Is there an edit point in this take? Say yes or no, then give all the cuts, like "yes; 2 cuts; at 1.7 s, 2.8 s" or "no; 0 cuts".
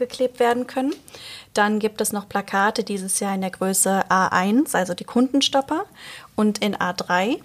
no; 0 cuts